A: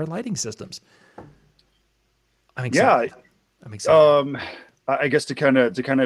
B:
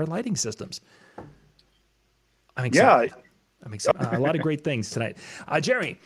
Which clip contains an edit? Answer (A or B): B